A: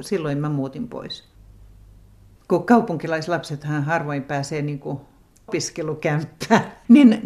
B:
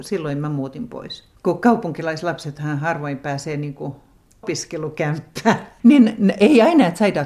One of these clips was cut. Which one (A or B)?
B